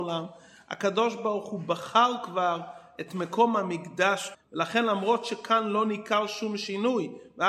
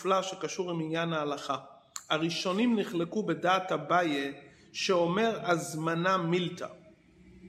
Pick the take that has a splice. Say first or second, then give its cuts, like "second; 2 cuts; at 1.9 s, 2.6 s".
first; 1 cut; at 4.3 s